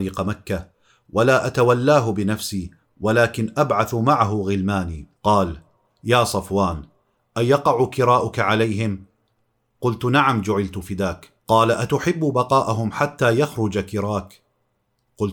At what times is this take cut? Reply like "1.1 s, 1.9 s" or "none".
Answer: 5.2 s, 11.4 s